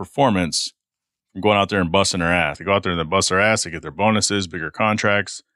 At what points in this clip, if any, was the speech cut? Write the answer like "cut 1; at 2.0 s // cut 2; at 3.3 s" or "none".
cut 1; at 2.5 s